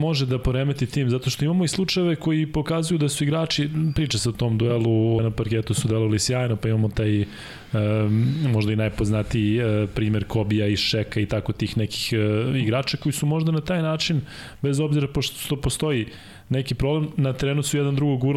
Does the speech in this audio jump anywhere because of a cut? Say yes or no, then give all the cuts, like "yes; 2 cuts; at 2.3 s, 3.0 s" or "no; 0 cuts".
yes; 1 cut; at 5.2 s